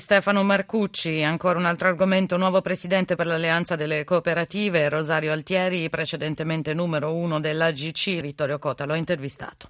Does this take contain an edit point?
yes; 1 cut; at 8.2 s

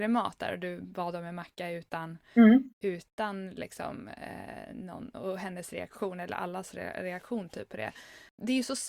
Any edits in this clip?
no; 0 cuts

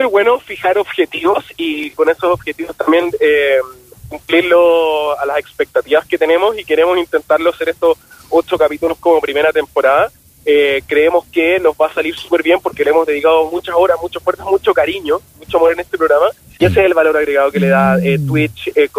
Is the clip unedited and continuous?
no; 1 cut; at 16.6 s

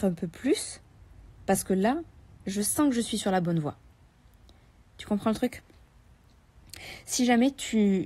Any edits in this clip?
no; 0 cuts

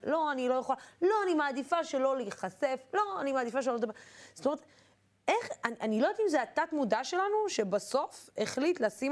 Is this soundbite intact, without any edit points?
yes; 0 cuts

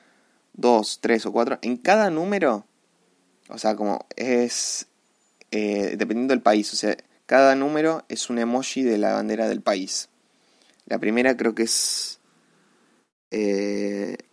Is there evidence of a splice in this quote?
no; 0 cuts

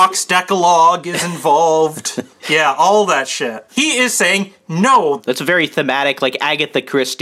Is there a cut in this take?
yes; 2 cuts; at 3.7 s, 5.2 s

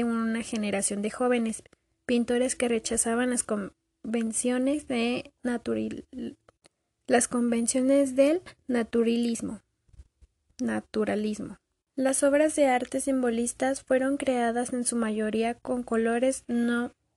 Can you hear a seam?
no; 0 cuts

